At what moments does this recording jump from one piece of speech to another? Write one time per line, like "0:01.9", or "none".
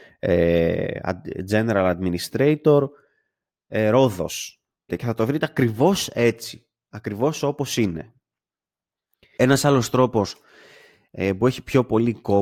0:04.9
0:09.4